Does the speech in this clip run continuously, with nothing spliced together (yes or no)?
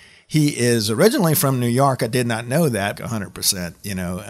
no